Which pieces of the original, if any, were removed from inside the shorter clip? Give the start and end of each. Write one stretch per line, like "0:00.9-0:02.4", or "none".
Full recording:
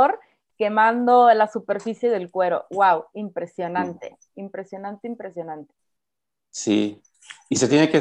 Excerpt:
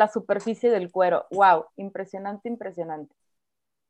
0:03.1-0:04.3